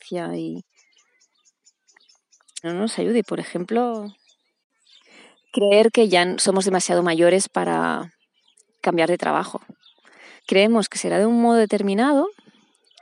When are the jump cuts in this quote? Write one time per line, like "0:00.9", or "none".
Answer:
0:02.6
0:10.4